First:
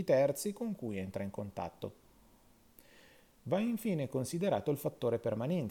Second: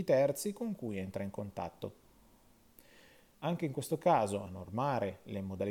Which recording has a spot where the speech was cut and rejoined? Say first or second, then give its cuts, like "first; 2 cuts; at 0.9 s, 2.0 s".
second; 1 cut; at 3.3 s